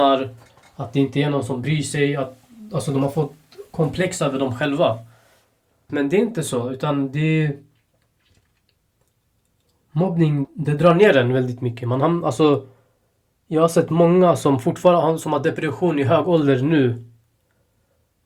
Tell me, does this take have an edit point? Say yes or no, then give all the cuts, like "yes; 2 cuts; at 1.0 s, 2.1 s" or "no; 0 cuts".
yes; 2 cuts; at 5.9 s, 10.4 s